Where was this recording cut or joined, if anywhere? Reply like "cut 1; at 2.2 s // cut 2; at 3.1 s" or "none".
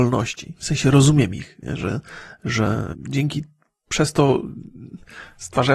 cut 1; at 2.9 s